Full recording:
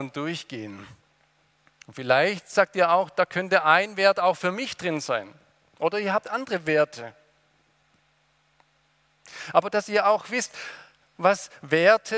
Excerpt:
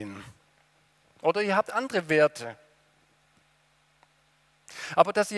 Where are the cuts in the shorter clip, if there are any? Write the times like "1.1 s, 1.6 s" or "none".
1.0 s